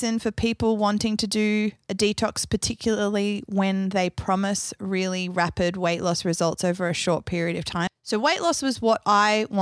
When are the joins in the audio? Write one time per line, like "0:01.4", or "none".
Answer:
0:07.9